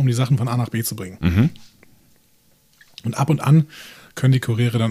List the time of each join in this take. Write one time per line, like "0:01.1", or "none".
none